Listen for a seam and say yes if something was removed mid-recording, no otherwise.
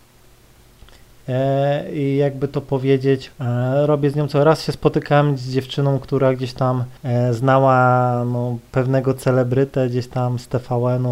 yes